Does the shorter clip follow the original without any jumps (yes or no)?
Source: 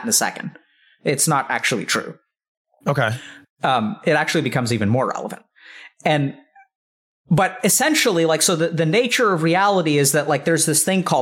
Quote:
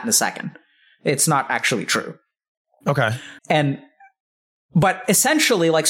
no